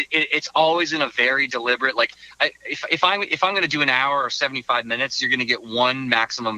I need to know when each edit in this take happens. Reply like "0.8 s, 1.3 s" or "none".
none